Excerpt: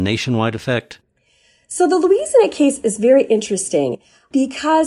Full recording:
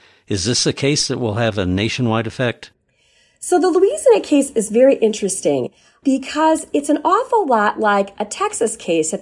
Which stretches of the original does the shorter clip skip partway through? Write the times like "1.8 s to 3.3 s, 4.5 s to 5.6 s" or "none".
none